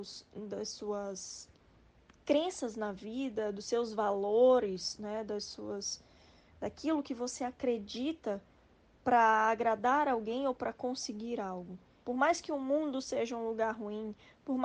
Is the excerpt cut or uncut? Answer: cut